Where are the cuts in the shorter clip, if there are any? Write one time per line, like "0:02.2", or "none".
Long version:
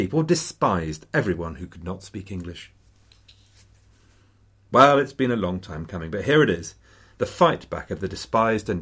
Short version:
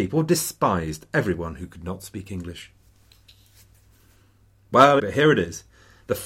0:05.0

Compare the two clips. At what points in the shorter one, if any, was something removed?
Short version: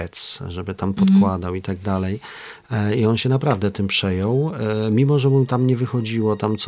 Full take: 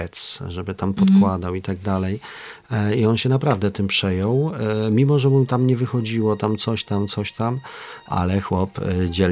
none

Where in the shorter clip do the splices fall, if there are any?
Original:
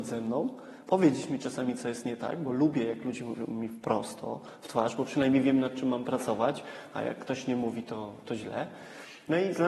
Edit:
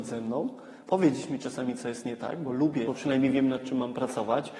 0:02.9

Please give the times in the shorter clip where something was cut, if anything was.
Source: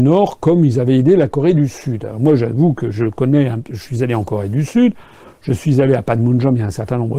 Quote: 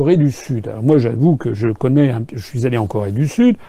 none

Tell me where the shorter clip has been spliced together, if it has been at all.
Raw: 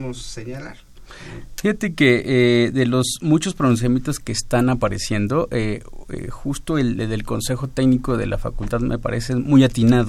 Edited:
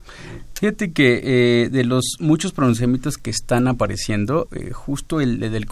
0:04.5

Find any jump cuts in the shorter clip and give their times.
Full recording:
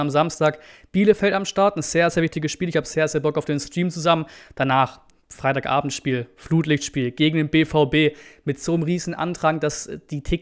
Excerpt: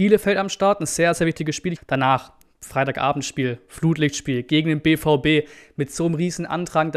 0:01.8

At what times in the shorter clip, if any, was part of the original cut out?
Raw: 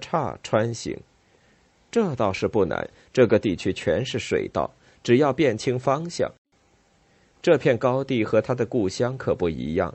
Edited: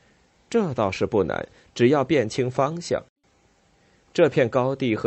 0:01.7

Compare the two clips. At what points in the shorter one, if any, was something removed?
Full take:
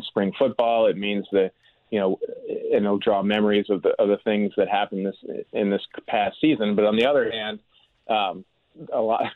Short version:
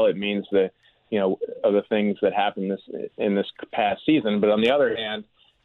0:01.6

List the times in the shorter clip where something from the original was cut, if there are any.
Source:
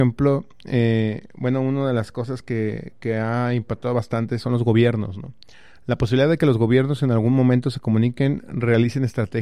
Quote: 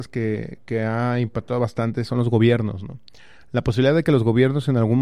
none

